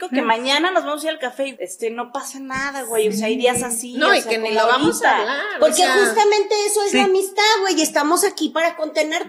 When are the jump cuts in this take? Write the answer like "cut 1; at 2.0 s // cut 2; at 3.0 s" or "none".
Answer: cut 1; at 1.5 s